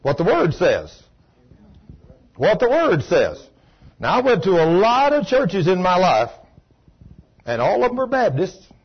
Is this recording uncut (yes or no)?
yes